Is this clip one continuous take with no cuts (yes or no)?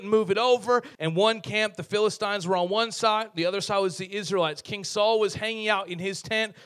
no